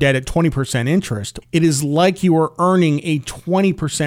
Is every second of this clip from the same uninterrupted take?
no; 1 cut; at 1.4 s

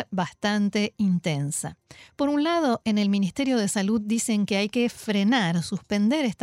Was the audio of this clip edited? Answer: no; 0 cuts

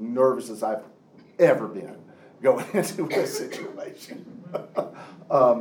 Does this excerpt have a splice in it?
no; 0 cuts

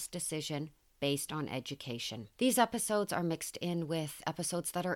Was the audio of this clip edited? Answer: yes; 1 cut; at 2.3 s

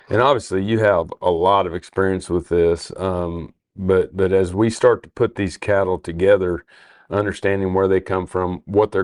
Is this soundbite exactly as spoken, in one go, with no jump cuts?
yes; 0 cuts

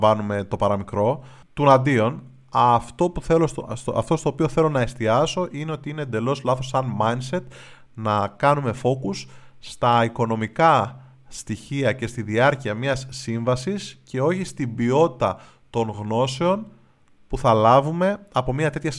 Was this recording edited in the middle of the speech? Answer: no; 0 cuts

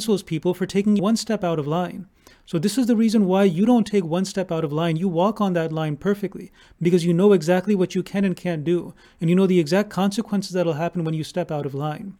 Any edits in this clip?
yes; 1 cut; at 1.0 s

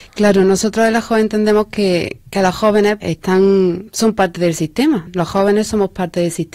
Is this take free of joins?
no; 1 cut; at 3.0 s

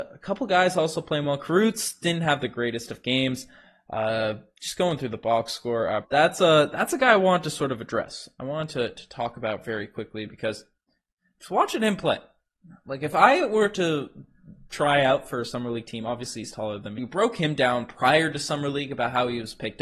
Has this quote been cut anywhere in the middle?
yes; 2 cuts; at 6.0 s, 17.0 s

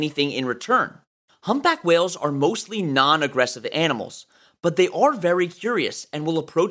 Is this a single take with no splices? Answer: no; 1 cut; at 1.3 s

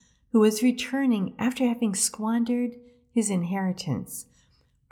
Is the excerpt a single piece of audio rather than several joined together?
yes; 0 cuts

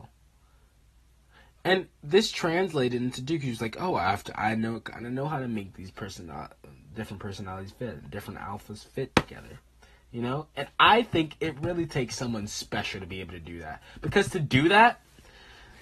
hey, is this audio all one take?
yes; 0 cuts

